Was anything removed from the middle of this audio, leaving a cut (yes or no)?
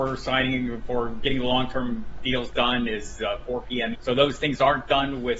yes